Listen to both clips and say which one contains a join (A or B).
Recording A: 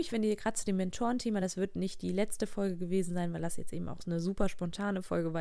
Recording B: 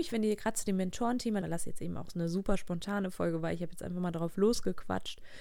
B